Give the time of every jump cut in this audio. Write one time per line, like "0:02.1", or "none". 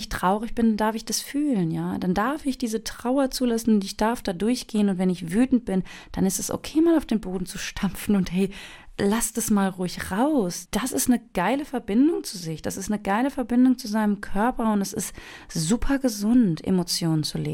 0:10.7